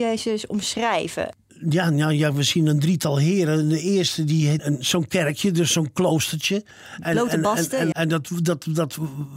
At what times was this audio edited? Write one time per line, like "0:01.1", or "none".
0:04.6
0:07.9